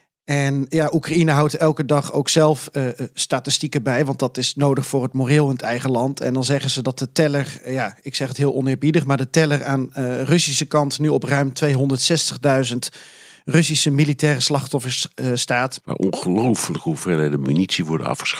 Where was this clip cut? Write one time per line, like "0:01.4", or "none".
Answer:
0:15.8